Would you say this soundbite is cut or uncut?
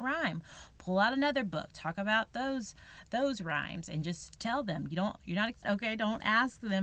cut